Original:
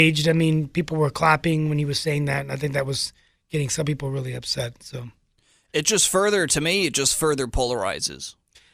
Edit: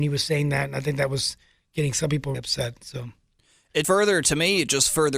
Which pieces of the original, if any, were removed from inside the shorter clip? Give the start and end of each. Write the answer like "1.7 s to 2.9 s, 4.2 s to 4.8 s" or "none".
4.1 s to 4.3 s, 5.8 s to 6.1 s